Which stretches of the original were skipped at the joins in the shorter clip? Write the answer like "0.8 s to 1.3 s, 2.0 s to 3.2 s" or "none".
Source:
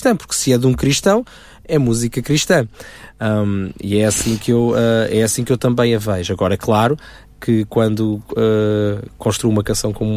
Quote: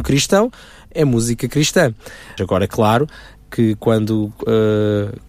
3.1 s to 6.3 s